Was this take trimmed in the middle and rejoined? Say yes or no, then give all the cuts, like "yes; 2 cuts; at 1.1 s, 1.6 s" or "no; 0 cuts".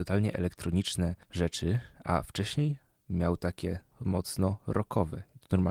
yes; 2 cuts; at 1.2 s, 3.9 s